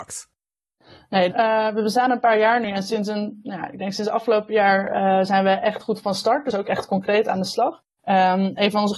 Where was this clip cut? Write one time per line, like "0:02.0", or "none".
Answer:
0:01.3